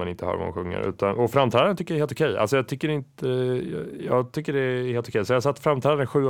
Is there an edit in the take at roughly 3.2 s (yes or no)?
no